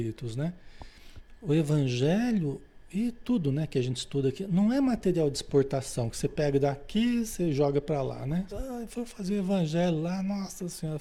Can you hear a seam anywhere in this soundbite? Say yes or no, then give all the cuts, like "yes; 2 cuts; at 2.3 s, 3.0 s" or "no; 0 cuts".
yes; 1 cut; at 8.5 s